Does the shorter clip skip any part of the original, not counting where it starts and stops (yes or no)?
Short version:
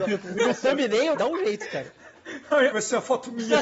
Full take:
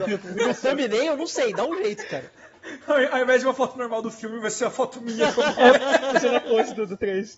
yes